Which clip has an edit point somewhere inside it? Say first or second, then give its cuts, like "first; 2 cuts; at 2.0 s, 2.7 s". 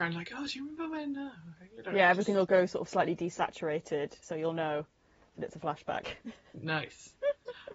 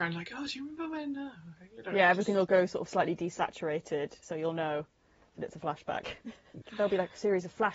second; 1 cut; at 6.6 s